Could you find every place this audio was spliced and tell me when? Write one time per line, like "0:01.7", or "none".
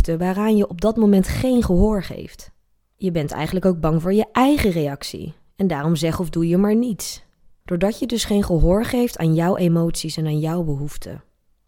0:07.6